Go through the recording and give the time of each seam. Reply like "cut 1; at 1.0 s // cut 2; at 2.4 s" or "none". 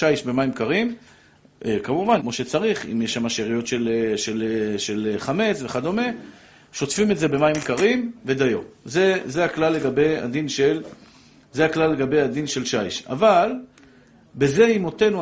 cut 1; at 2.2 s